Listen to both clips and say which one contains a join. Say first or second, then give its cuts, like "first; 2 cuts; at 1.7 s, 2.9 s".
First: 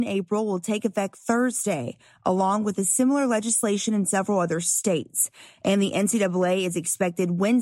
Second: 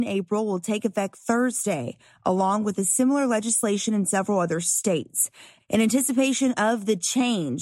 second; 1 cut; at 5.6 s